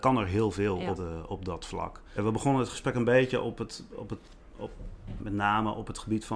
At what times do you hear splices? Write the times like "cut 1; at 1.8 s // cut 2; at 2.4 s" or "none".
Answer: cut 1; at 1.0 s // cut 2; at 2.2 s // cut 3; at 5.2 s